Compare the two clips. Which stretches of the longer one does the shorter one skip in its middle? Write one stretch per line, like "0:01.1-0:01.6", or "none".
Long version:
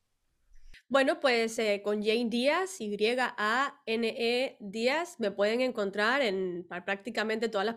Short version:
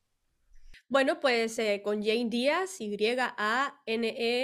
none